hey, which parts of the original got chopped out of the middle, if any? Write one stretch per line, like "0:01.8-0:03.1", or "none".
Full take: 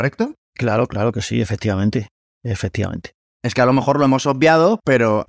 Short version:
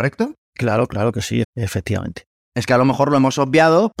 0:01.4-0:02.3